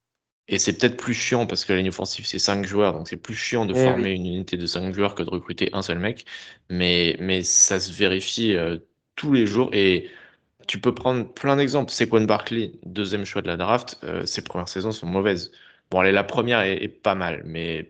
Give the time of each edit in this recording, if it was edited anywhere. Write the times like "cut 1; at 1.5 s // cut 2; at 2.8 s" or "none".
none